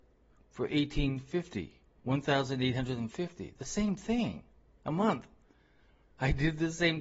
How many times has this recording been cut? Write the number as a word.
one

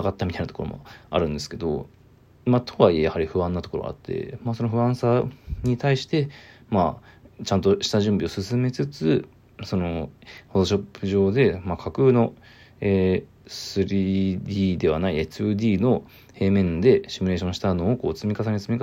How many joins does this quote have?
zero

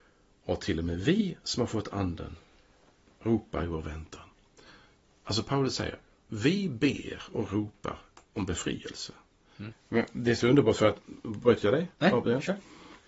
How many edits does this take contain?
one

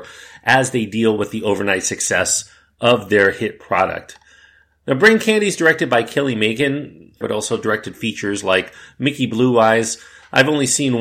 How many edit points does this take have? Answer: one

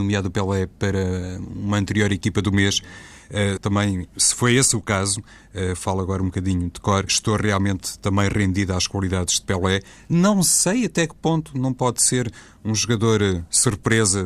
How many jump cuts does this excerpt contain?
two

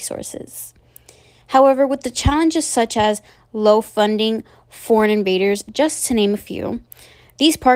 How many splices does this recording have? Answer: one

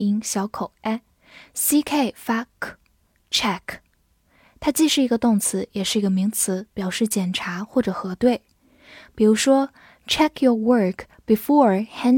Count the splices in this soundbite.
zero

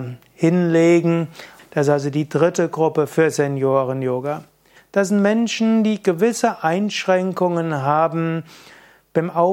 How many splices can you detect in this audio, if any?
two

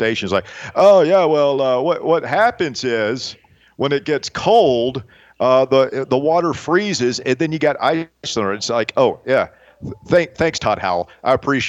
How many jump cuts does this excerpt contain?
zero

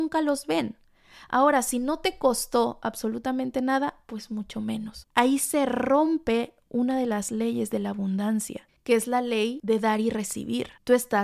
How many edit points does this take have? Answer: two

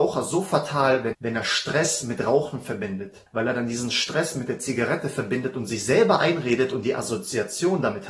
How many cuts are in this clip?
two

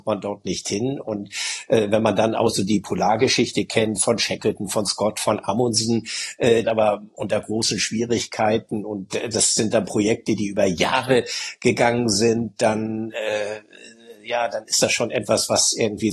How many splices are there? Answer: one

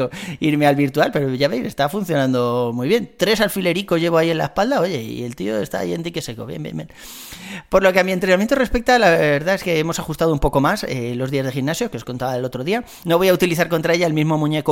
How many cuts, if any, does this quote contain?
one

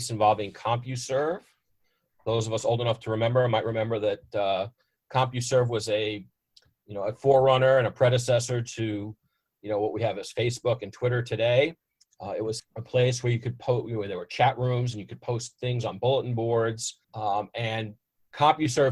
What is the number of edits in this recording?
two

